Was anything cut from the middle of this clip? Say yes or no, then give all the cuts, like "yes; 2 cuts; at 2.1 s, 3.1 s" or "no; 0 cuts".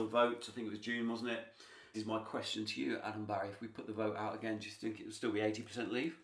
yes; 1 cut; at 1.9 s